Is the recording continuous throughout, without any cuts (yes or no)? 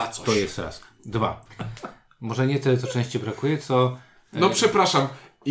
no